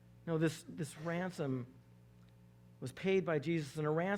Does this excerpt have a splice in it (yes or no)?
no